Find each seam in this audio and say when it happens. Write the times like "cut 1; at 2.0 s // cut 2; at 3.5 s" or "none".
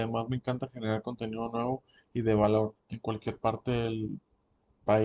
cut 1; at 2.8 s